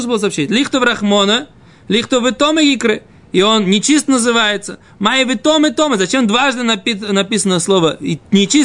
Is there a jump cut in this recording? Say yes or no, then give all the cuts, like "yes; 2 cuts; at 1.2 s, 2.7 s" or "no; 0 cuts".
no; 0 cuts